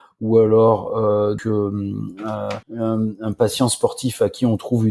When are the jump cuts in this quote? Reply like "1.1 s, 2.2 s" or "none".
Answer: 1.4 s, 2.6 s